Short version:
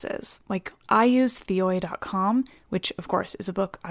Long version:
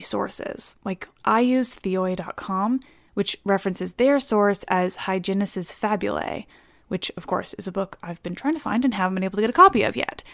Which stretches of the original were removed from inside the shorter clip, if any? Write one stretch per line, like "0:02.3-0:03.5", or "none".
0:02.9-0:06.8